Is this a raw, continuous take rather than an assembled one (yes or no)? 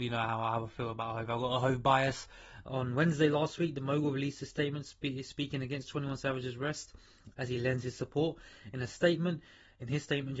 no